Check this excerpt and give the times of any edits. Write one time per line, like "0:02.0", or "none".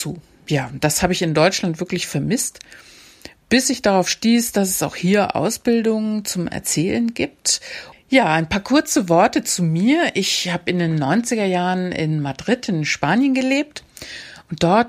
0:07.9